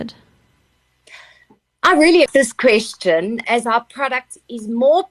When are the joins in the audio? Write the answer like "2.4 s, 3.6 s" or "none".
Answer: 2.3 s, 3.4 s